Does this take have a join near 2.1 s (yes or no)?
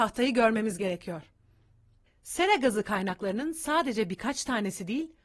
yes